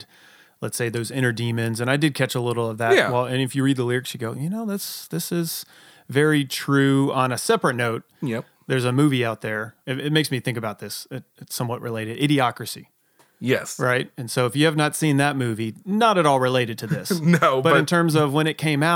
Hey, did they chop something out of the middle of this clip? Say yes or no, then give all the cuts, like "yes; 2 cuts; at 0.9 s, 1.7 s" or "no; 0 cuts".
no; 0 cuts